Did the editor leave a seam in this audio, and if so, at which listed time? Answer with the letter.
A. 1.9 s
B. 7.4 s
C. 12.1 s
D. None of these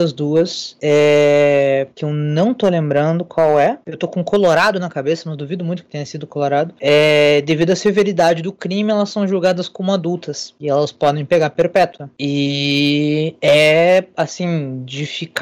A